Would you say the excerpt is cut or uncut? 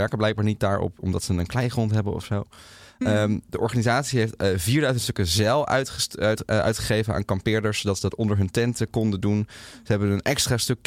uncut